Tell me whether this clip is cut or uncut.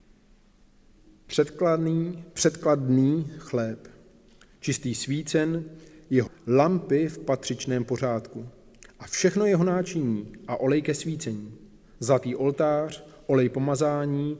cut